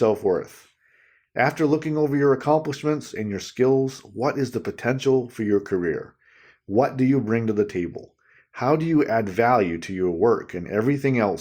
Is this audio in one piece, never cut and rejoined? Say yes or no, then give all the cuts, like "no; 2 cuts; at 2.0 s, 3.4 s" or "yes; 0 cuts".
yes; 0 cuts